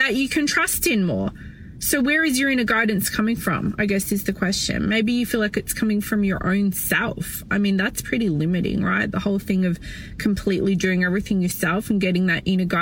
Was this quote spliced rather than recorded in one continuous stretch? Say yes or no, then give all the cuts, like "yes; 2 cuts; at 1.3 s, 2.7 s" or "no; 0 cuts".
no; 0 cuts